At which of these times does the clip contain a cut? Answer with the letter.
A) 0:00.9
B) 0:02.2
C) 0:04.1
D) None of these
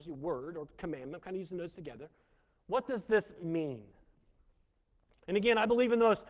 D